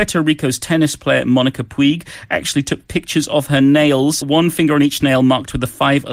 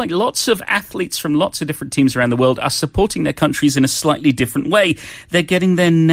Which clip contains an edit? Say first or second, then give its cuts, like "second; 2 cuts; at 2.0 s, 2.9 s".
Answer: first; 1 cut; at 4.2 s